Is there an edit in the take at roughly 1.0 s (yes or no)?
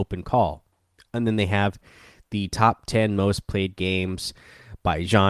yes